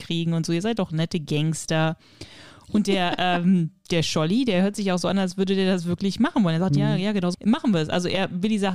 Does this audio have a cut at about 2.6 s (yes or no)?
no